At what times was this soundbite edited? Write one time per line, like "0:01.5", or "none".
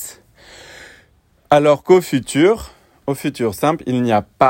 none